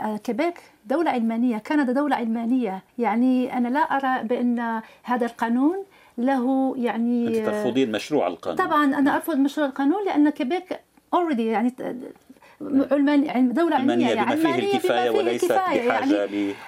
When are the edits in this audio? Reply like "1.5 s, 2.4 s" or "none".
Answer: 2.9 s, 13.8 s